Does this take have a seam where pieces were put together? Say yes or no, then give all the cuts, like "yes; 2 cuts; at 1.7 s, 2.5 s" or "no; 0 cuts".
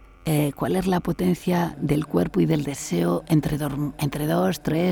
no; 0 cuts